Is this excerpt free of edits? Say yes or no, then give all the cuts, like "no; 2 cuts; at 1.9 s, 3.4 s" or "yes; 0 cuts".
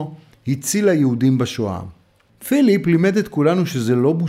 no; 1 cut; at 2.3 s